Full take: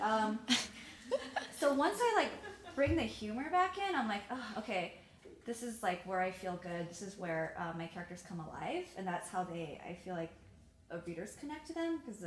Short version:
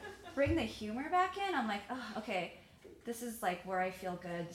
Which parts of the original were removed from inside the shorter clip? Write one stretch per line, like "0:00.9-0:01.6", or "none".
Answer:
none